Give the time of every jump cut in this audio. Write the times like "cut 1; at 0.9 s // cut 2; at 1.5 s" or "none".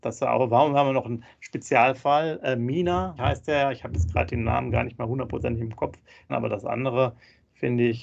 cut 1; at 3.2 s // cut 2; at 6.3 s